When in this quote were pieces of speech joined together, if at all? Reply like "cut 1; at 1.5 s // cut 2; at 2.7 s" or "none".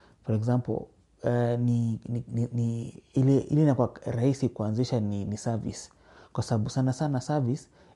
none